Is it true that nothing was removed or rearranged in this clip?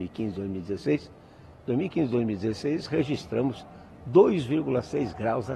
yes; 0 cuts

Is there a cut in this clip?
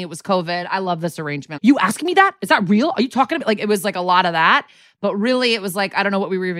yes; 1 cut; at 1.6 s

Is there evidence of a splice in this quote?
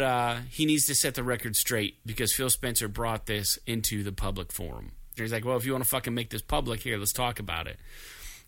yes; 1 cut; at 5.2 s

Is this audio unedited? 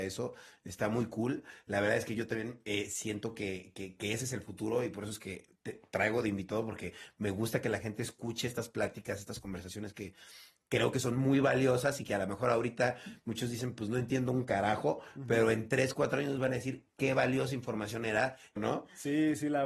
no; 1 cut; at 18.6 s

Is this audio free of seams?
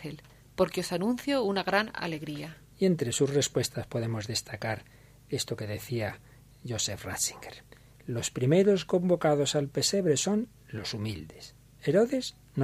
yes; 0 cuts

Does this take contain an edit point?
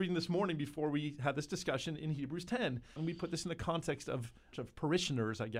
yes; 2 cuts; at 3.0 s, 4.5 s

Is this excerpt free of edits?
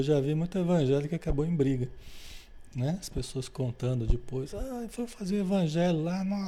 yes; 0 cuts

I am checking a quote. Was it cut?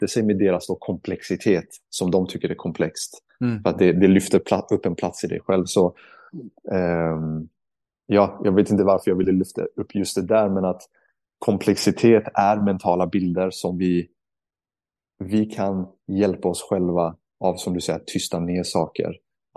no; 0 cuts

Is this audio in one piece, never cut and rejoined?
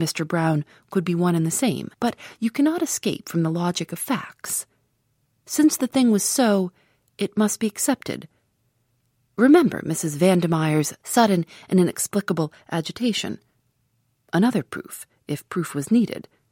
no; 1 cut; at 1.9 s

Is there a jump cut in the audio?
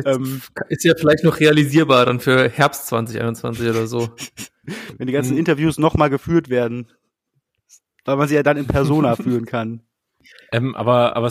no; 0 cuts

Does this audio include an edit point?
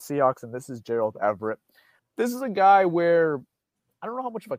yes; 1 cut; at 2.0 s

